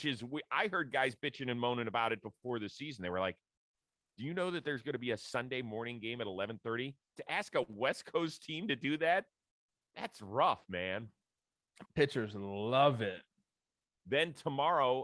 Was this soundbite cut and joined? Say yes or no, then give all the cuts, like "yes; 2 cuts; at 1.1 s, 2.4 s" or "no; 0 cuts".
yes; 2 cuts; at 11.9 s, 13.8 s